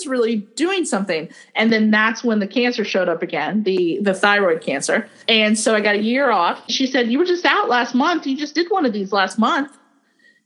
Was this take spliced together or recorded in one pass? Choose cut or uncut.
cut